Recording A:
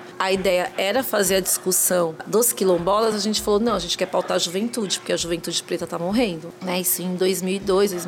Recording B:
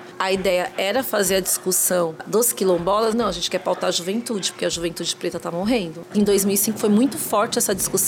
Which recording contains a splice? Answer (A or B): B